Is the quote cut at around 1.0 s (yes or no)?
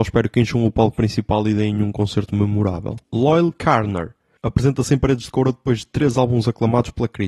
no